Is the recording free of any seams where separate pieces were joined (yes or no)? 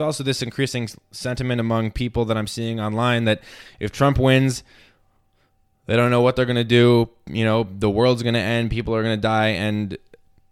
yes